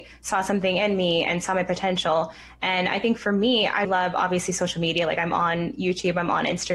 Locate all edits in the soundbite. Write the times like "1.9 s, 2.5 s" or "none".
3.8 s